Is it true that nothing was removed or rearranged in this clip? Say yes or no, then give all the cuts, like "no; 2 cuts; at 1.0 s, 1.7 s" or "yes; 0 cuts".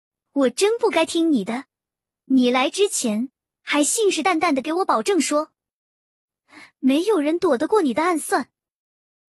yes; 0 cuts